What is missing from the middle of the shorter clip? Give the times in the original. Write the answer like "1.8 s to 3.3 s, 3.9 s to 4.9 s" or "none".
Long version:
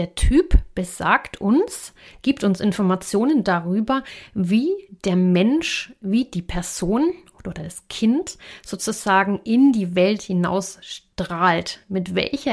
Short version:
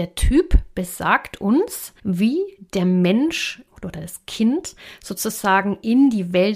2.0 s to 4.3 s, 6.0 s to 7.3 s